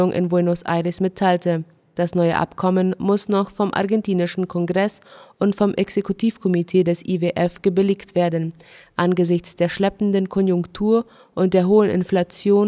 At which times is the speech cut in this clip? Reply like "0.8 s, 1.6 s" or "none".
none